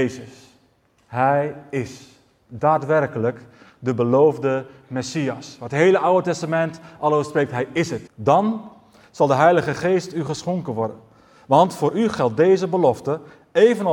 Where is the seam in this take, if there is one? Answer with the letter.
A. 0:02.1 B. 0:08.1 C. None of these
B